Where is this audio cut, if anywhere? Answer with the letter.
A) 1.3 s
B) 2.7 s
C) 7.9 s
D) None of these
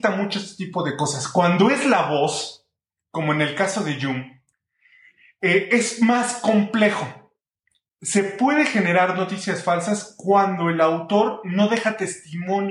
C